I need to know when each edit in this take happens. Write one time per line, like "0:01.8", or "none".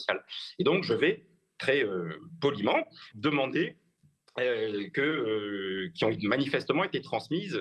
0:03.1
0:04.9